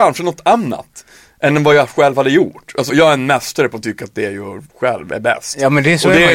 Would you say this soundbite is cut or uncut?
cut